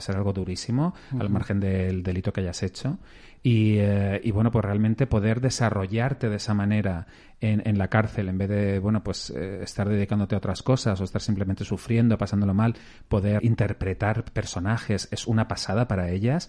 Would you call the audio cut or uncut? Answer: cut